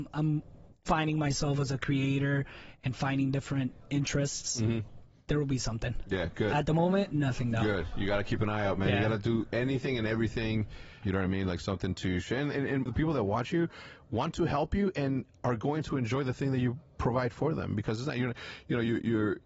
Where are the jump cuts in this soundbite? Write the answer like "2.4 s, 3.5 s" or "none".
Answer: 11.0 s, 12.9 s